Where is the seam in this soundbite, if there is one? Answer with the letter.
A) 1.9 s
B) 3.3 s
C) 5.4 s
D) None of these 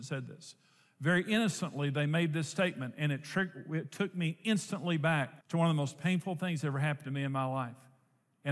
C